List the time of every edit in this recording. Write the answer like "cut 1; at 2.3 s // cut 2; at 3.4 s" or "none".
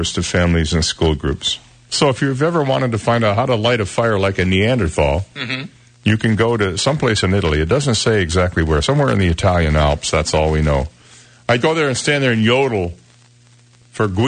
cut 1; at 11.6 s

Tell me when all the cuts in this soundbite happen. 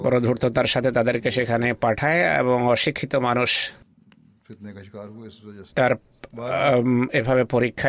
cut 1; at 5.7 s

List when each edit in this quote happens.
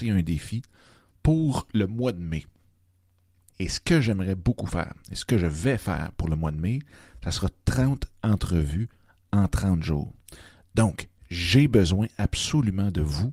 cut 1; at 3.5 s

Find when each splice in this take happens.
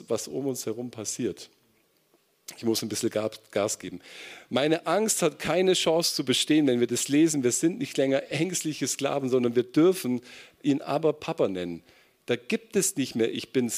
none

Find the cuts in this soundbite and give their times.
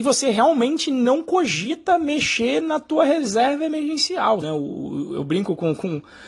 cut 1; at 4.4 s

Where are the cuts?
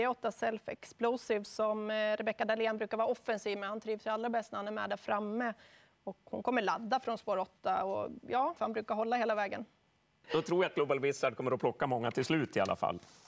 cut 1; at 8.6 s // cut 2; at 10.2 s

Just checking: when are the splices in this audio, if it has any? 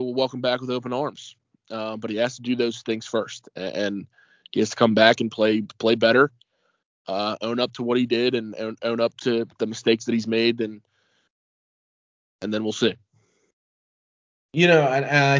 none

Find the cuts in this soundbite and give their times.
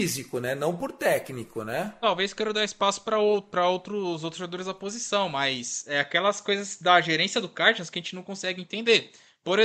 none

